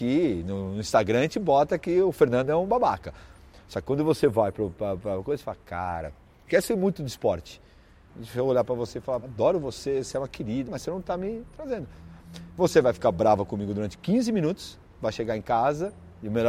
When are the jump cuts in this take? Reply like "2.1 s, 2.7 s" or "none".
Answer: 8.1 s, 9.2 s, 10.6 s